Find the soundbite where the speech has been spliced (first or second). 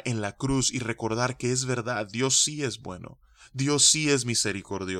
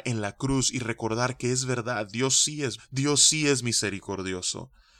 second